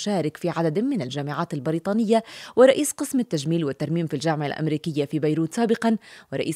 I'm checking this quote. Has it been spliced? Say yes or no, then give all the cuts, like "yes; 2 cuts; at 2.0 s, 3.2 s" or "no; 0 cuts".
no; 0 cuts